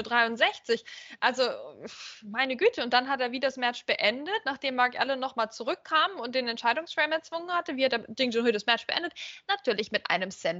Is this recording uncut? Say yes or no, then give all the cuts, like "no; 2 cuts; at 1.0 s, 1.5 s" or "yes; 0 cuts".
yes; 0 cuts